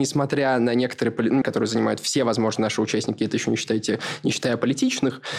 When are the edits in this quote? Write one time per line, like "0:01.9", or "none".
0:01.4